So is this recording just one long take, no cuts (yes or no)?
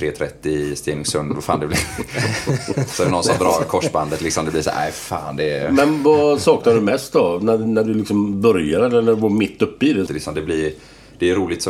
no